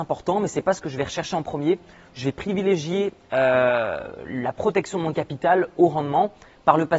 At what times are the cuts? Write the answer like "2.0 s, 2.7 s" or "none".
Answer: none